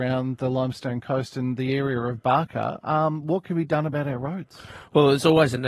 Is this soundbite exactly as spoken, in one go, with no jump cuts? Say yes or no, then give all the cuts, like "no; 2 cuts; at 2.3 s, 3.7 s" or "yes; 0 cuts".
yes; 0 cuts